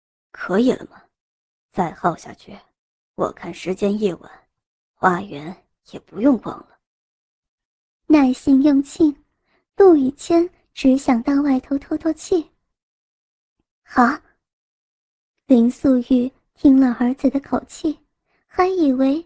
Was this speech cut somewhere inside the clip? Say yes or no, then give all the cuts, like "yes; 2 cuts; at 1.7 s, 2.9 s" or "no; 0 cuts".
no; 0 cuts